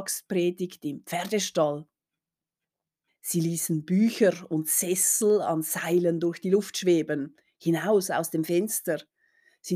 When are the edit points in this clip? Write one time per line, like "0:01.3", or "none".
0:03.1